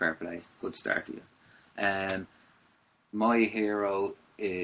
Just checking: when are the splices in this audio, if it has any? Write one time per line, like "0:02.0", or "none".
none